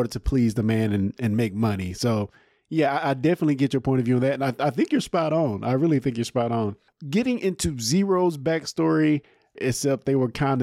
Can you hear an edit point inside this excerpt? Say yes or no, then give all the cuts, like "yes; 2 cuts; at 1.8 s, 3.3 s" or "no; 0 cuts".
yes; 1 cut; at 9.6 s